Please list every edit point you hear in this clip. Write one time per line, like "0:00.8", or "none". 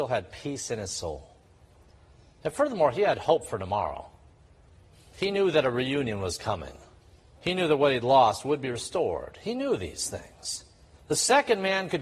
none